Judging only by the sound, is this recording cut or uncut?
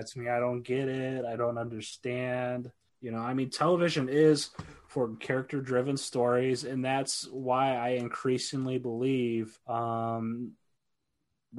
cut